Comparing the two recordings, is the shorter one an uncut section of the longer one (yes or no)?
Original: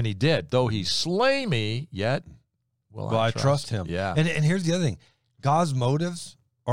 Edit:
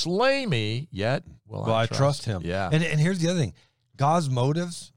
no